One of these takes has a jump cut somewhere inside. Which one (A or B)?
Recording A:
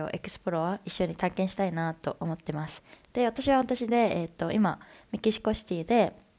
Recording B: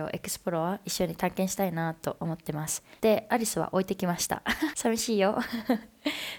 B